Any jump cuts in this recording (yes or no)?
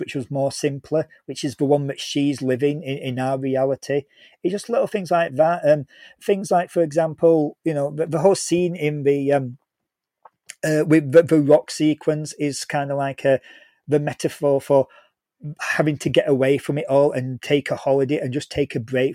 no